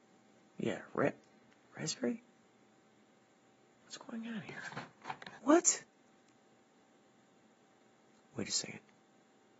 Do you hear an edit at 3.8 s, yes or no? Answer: yes